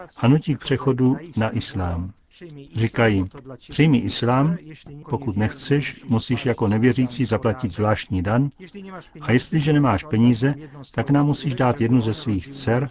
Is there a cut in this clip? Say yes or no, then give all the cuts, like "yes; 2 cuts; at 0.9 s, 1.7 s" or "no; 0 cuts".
yes; 1 cut; at 5.0 s